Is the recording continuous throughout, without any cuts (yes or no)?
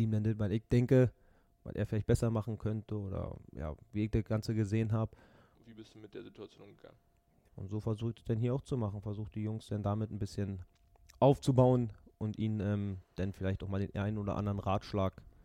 no